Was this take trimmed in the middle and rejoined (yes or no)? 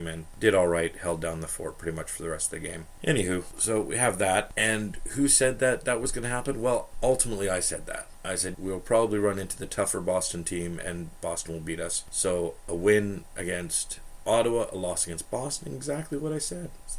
yes